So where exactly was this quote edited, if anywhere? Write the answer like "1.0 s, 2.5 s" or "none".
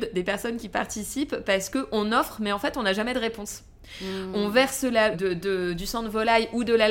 5.1 s

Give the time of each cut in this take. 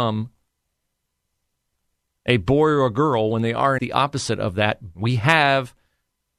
3.8 s, 4.9 s

